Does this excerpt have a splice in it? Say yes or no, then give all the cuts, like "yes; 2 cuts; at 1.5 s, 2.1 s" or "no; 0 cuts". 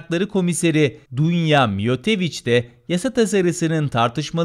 yes; 1 cut; at 1.1 s